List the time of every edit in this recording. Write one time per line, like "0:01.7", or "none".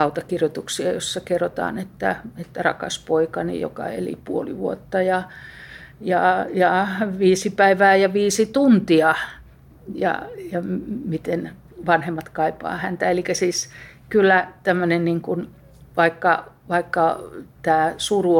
none